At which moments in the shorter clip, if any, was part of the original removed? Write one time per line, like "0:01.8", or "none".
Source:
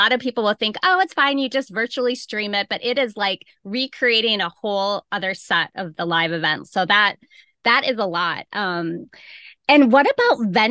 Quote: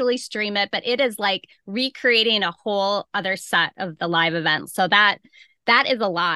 none